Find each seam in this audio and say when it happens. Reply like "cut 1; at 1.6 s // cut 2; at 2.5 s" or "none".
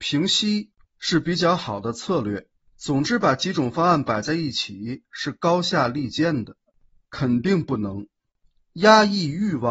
cut 1; at 2.7 s // cut 2; at 7.0 s